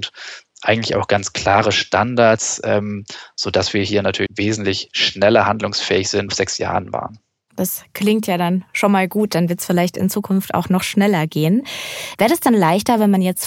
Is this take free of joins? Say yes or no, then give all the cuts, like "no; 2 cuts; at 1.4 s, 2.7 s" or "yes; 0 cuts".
no; 3 cuts; at 4.3 s, 6.3 s, 12.1 s